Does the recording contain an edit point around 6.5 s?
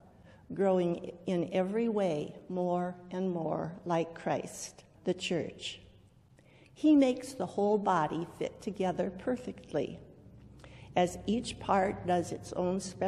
no; 1 cut; at 4.9 s

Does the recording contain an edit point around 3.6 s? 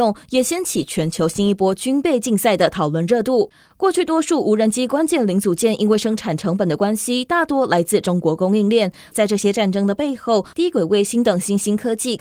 no; 2 cuts; at 9.1 s, 10.5 s

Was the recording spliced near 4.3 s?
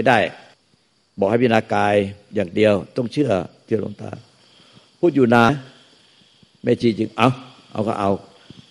no; 1 cut; at 5.5 s

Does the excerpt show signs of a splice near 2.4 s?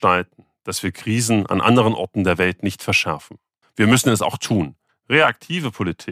no; 2 cuts; at 3.6 s, 4.9 s

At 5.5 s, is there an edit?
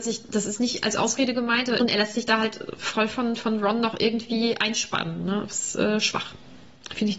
no; 1 cut; at 1.8 s

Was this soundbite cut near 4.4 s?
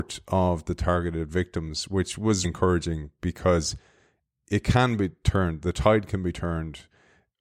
no; 1 cut; at 2.4 s

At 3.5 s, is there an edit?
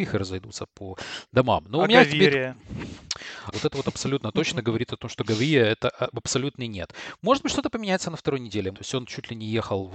yes; 2 cuts; at 3.5 s, 8.7 s

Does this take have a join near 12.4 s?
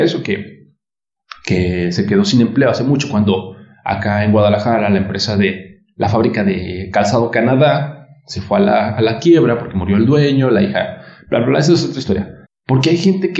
yes; 1 cut; at 12.4 s

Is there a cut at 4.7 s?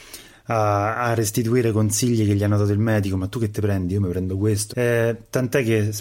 yes; 1 cut; at 4.7 s

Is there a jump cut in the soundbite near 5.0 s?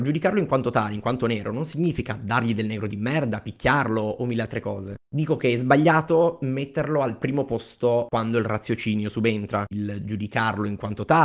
yes; 2 cuts; at 5.0 s, 9.7 s

